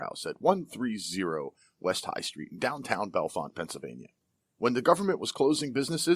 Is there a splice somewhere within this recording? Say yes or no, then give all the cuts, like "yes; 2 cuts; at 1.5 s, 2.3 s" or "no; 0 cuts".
no; 0 cuts